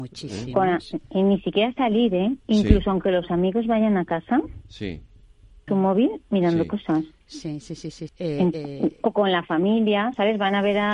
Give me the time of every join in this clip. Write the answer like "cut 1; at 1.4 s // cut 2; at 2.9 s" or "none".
cut 1; at 5.7 s // cut 2; at 8.1 s